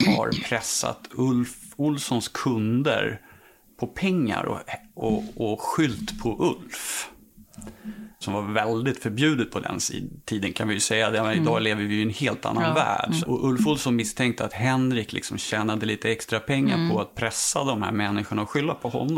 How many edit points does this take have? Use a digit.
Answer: 2